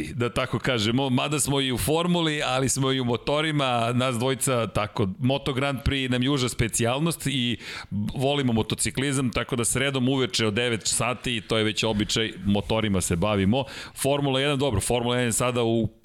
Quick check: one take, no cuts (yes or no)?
yes